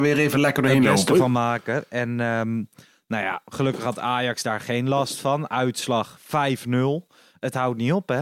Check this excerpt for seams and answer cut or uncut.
uncut